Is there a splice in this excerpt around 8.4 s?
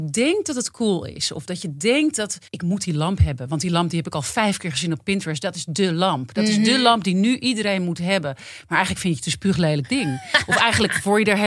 no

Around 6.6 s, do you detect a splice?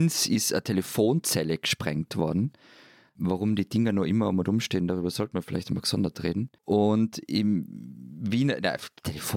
yes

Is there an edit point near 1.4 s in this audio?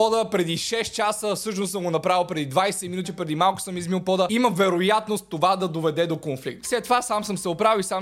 no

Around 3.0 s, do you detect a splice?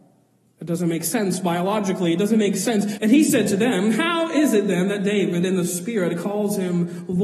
yes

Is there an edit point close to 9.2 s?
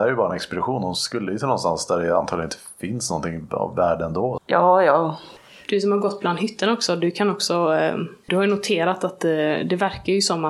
no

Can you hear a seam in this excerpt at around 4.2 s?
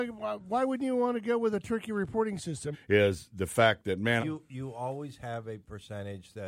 yes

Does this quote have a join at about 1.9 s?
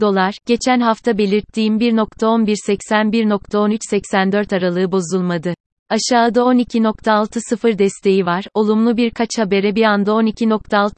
no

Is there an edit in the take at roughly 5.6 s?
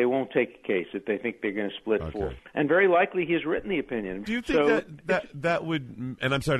no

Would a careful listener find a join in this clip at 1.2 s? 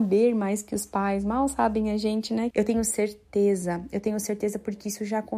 no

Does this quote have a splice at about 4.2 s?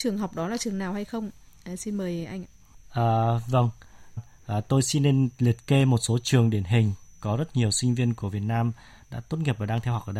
yes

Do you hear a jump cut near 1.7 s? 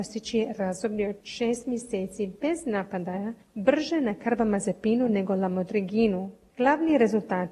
no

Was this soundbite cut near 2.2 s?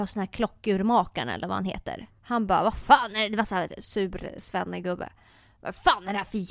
yes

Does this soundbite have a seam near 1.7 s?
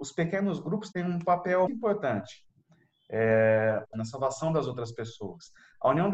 yes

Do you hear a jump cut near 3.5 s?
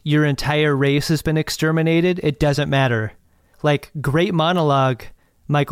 yes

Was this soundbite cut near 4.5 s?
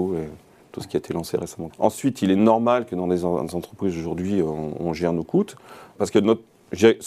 no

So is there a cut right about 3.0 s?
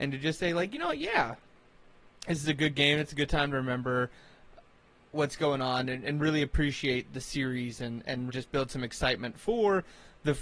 no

